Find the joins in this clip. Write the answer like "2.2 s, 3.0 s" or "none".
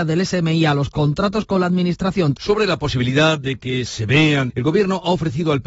2.4 s, 4.5 s